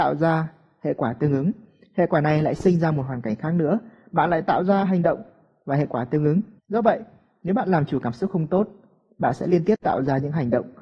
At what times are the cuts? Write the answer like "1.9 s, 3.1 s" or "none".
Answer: 6.6 s